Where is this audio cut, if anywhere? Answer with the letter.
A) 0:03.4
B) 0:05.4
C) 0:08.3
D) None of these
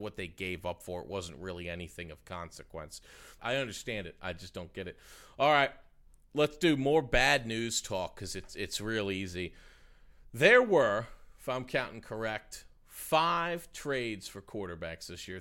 A